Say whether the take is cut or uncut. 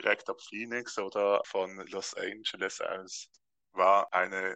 uncut